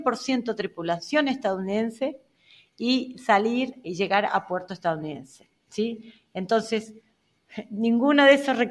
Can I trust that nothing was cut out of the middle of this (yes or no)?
no